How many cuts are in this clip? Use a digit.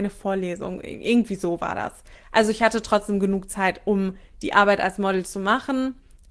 0